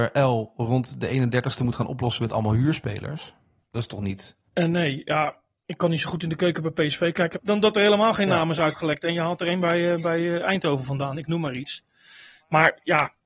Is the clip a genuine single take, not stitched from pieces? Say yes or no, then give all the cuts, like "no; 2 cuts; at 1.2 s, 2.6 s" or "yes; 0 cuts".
no; 2 cuts; at 4.5 s, 7.3 s